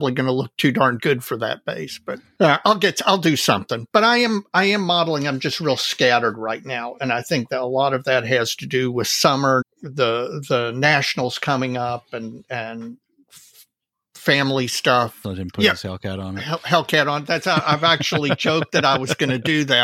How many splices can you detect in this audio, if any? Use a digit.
2